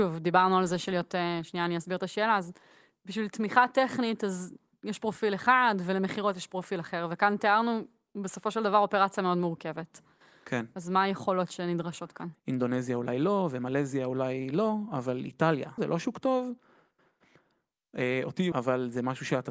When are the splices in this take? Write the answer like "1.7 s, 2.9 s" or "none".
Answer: 12.3 s, 15.8 s, 18.5 s